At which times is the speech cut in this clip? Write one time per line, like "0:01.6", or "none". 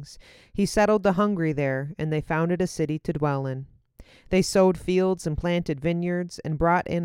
none